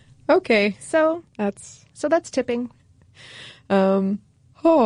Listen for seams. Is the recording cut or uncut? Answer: cut